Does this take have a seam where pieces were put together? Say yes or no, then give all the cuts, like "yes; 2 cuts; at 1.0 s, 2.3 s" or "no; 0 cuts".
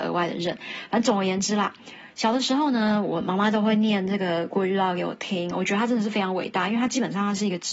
no; 0 cuts